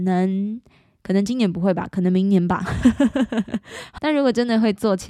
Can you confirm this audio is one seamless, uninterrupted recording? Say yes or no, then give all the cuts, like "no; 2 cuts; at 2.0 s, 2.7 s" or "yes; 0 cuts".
no; 1 cut; at 4.0 s